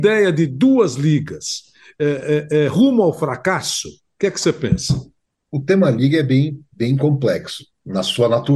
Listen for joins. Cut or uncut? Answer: uncut